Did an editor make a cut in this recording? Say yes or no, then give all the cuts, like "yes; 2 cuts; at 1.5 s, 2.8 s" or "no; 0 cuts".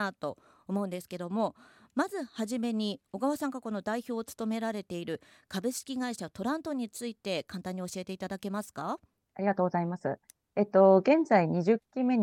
no; 0 cuts